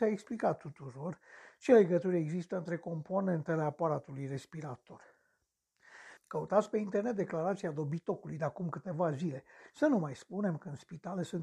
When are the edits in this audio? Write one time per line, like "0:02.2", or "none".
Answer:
0:06.2
0:09.7